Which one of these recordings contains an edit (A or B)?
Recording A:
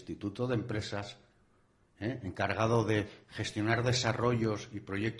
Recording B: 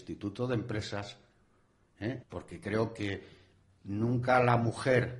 B